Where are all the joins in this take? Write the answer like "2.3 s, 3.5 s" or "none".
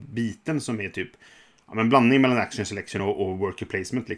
none

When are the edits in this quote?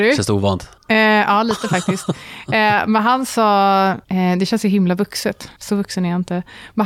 none

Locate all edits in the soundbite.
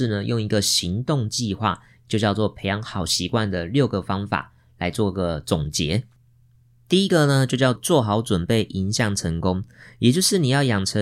7.8 s

